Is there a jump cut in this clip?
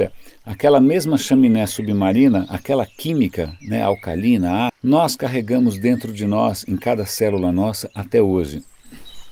yes; 1 cut; at 4.7 s

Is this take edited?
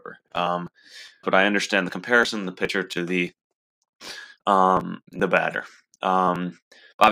yes; 2 cuts; at 1.2 s, 5.1 s

